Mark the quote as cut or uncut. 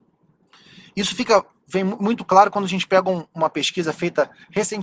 uncut